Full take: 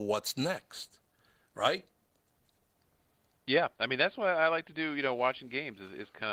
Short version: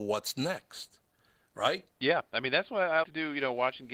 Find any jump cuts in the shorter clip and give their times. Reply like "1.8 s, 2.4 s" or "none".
1.9 s, 3.0 s